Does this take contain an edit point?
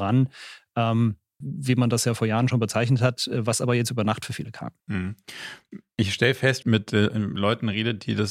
yes; 3 cuts; at 1.4 s, 4.8 s, 6.6 s

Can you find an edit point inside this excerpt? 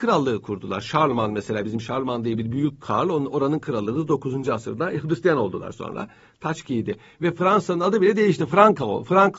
no; 0 cuts

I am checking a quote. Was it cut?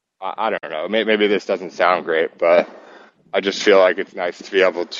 no; 0 cuts

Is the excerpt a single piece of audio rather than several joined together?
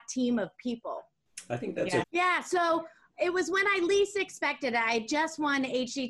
no; 1 cut; at 2.0 s

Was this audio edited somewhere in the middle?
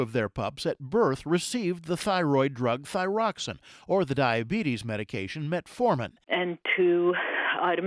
yes; 1 cut; at 6.2 s

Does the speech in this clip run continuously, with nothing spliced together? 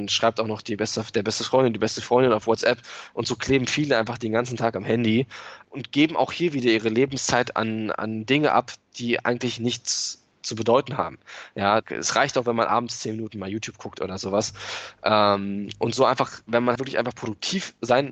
no; 2 cuts; at 11.8 s, 16.8 s

